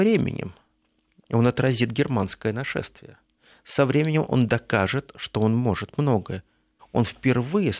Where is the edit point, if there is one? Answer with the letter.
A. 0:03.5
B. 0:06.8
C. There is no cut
B